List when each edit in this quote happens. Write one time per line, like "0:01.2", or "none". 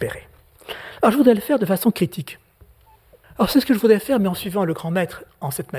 0:03.2